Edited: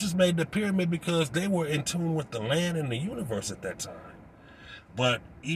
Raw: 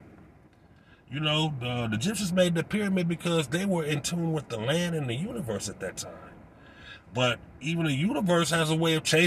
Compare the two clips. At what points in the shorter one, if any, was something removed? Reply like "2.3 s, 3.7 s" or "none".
none